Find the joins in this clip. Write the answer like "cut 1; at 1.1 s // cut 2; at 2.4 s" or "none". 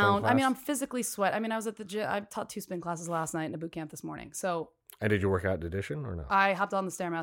none